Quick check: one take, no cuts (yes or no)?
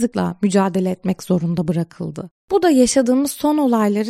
no